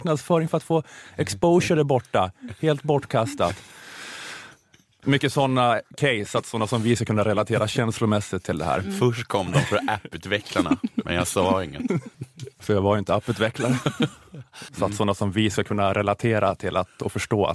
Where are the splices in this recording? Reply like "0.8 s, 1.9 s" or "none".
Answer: 14.7 s